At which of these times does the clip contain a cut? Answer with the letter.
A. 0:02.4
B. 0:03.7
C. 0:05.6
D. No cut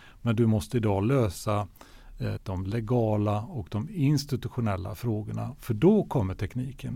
A